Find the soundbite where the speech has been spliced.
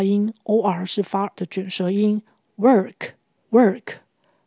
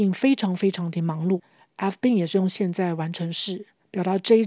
first; 1 cut; at 1.3 s

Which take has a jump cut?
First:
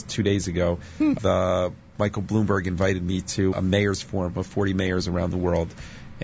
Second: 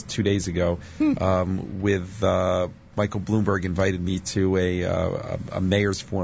first; 2 cuts; at 1.2 s, 3.5 s

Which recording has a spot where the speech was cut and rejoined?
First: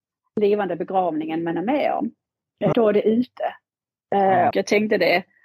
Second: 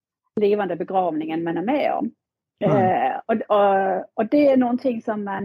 first; 2 cuts; at 2.7 s, 4.5 s

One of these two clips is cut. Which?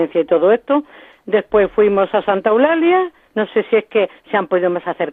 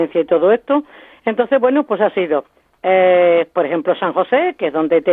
first; 2 cuts; at 1.1 s, 3.3 s

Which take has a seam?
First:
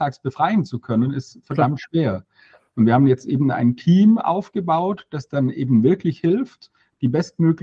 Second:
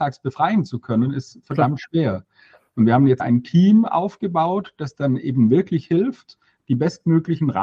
second; 1 cut; at 3.2 s

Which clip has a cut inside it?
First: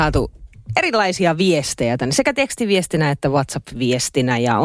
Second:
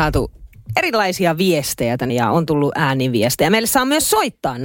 second; 1 cut; at 2.1 s

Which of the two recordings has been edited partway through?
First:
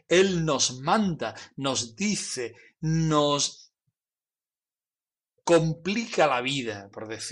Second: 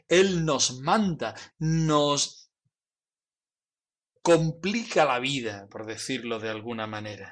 second; 1 cut; at 1.5 s

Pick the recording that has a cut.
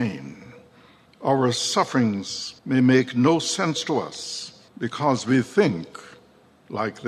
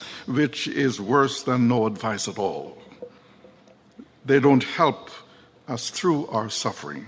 first; 3 cuts; at 1.1 s, 2.6 s, 4.7 s

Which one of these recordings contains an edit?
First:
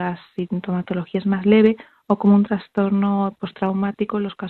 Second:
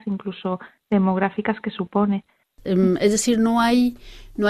second; 1 cut; at 2.5 s

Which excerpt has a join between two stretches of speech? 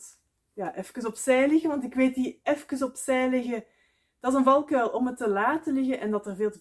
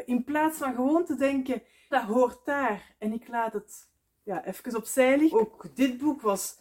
second; 2 cuts; at 1.9 s, 5.3 s

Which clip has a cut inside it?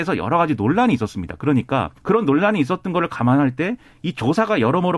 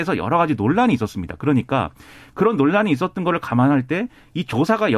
first; 1 cut; at 2.0 s

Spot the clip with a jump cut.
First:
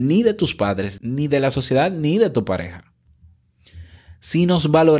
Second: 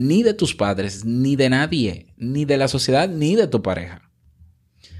first; 1 cut; at 1.0 s

